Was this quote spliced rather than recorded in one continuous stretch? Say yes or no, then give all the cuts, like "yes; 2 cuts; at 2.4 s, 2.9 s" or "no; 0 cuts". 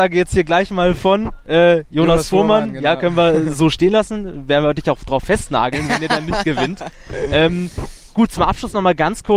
no; 0 cuts